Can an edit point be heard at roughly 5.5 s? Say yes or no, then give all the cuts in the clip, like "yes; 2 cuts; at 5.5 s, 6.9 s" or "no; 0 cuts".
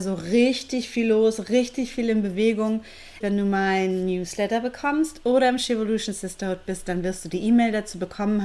no; 1 cut; at 3.2 s